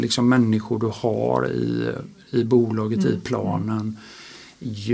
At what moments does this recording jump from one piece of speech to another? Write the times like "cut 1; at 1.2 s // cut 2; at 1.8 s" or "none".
none